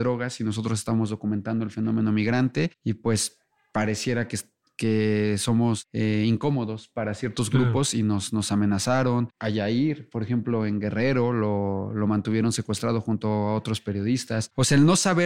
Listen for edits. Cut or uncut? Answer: uncut